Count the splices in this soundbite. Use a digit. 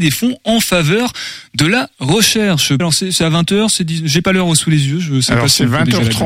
1